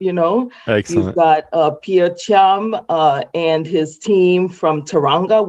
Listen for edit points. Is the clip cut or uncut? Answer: uncut